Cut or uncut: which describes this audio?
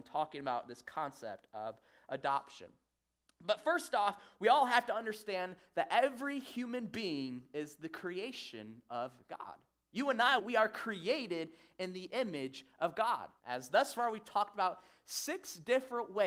cut